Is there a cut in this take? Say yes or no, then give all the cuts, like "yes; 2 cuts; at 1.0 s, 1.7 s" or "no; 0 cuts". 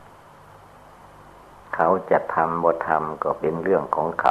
yes; 1 cut; at 1.6 s